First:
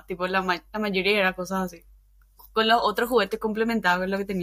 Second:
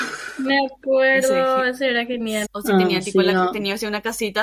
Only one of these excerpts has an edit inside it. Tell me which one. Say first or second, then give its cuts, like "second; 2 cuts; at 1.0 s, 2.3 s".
second; 1 cut; at 2.4 s